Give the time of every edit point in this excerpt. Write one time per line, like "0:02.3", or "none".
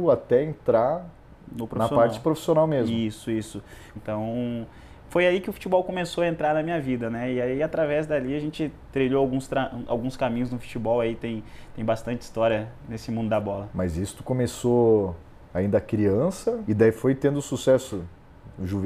0:04.0
0:16.6